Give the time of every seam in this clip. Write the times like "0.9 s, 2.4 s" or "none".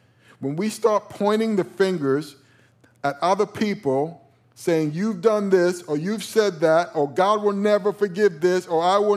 none